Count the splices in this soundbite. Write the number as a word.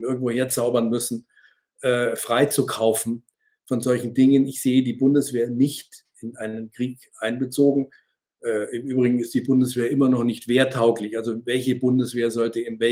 zero